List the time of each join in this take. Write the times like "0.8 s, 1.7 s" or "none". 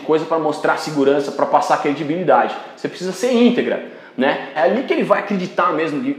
4.6 s